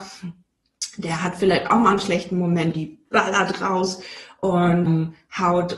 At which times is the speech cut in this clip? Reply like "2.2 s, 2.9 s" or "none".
2.7 s